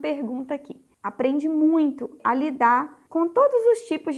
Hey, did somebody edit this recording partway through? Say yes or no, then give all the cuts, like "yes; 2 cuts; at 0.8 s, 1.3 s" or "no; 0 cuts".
yes; 1 cut; at 0.9 s